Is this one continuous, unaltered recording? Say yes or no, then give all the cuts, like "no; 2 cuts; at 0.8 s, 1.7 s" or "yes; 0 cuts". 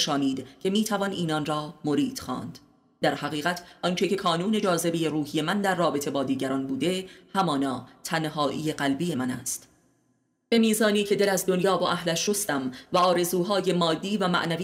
yes; 0 cuts